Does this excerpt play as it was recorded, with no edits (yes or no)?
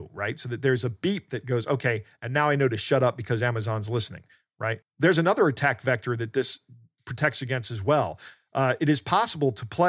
no